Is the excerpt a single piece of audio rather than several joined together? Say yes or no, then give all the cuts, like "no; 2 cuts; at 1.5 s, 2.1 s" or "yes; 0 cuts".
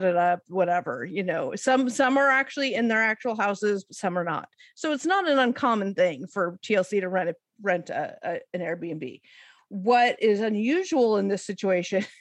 yes; 0 cuts